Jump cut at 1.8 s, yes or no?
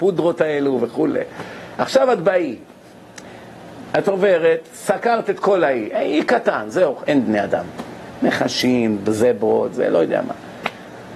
no